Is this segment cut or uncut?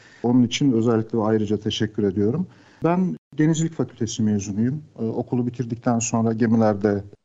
uncut